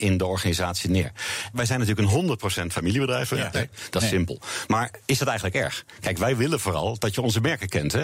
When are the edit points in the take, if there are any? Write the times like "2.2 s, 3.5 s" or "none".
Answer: 1.5 s, 3.5 s